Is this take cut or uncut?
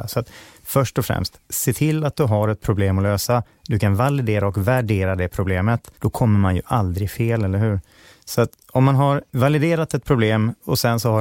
uncut